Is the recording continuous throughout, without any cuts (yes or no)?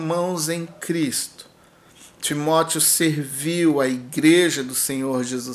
yes